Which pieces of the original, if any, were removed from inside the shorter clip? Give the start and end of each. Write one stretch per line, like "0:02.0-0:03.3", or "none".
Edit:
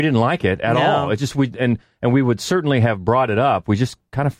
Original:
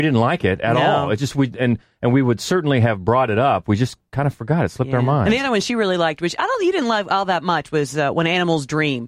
none

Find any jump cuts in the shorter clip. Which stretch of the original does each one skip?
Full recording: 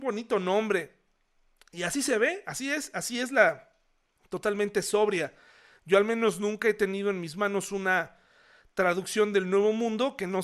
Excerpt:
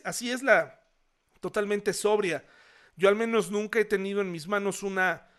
none

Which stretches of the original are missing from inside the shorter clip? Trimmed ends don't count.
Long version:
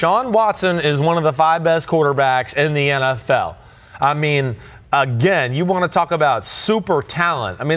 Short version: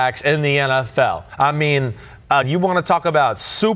0:03.6-0:03.9
0:05.0-0:05.5

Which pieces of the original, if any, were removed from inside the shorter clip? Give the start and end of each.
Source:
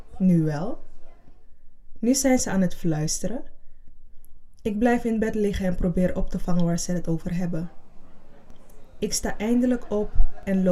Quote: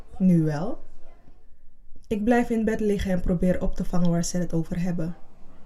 0:02.0-0:04.6

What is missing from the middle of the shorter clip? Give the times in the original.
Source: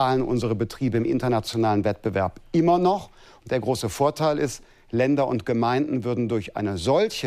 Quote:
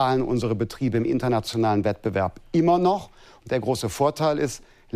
none

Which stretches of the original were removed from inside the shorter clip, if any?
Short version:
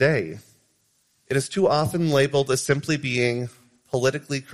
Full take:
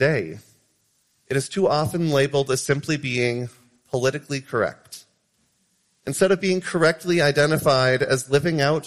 none

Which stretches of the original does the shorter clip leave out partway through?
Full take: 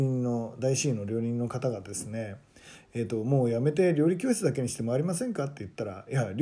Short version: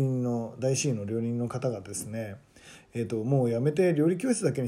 none

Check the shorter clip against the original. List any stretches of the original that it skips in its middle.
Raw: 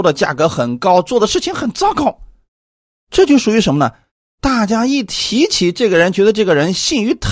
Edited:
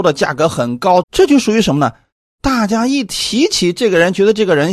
0:01.0-0:03.0

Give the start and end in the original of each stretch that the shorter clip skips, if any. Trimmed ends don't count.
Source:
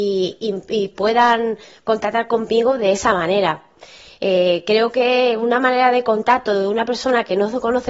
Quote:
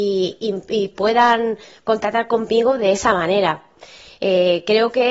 none

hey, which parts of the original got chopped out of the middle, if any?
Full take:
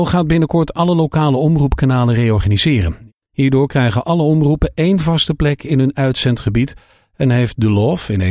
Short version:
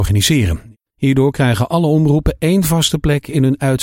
none

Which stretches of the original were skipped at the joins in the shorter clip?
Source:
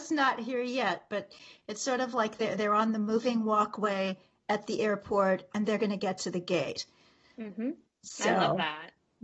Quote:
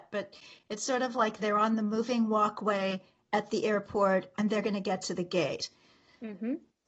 0:02.4-0:02.6

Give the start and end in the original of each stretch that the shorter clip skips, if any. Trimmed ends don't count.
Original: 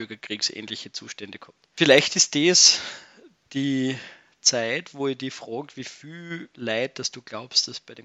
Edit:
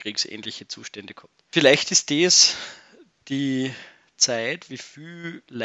0:04.9-0:05.7

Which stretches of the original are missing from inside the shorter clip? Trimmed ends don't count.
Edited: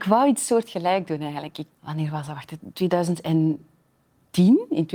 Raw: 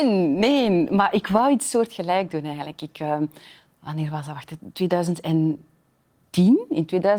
0:02.9-0:03.7

